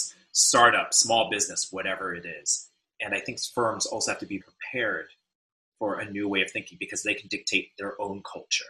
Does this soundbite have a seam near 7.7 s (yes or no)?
no